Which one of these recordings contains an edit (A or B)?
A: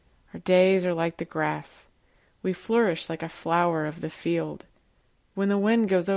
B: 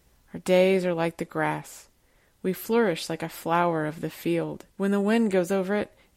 B